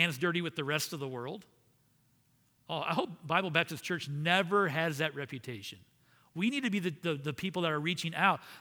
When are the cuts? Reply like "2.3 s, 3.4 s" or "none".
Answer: none